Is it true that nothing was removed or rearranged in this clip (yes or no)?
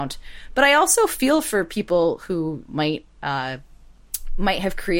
no